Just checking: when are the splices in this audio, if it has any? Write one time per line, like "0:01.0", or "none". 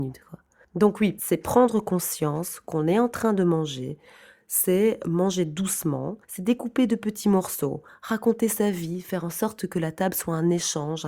0:06.2